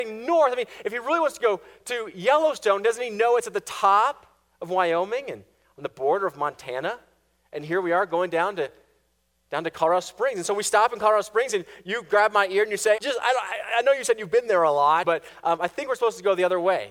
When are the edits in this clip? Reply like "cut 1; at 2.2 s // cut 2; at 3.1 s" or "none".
cut 1; at 13.0 s // cut 2; at 15.0 s